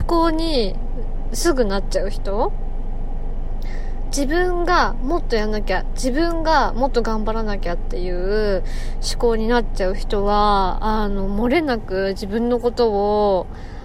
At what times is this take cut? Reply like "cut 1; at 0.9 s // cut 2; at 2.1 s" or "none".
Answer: none